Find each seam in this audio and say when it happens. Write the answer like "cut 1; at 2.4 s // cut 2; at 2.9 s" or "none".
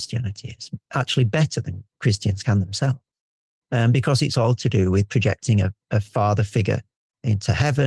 none